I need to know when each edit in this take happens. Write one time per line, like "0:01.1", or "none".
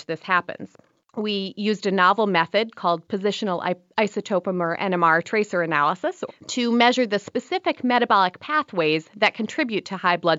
0:06.3